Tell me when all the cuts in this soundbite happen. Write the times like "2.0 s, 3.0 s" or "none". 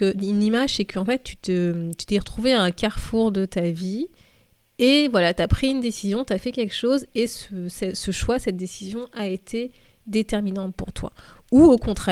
none